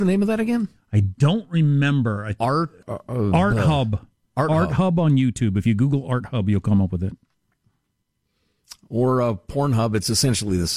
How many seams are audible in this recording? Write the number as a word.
one